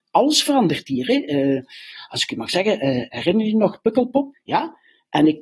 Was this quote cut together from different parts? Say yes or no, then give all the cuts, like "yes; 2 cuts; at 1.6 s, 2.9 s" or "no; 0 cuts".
yes; 1 cut; at 4.3 s